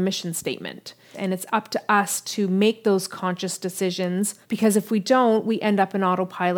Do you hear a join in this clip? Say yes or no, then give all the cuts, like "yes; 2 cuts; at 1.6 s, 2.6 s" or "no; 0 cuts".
yes; 2 cuts; at 1.1 s, 4.4 s